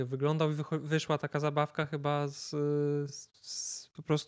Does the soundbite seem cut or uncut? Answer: uncut